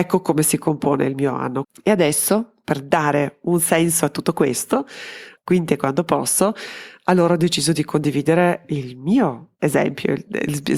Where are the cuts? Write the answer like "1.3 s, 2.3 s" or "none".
1.6 s, 5.4 s